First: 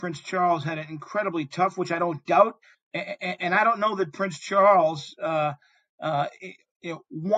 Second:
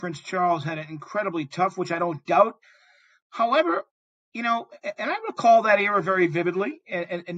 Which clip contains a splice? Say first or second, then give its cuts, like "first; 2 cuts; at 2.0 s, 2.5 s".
first; 1 cut; at 2.7 s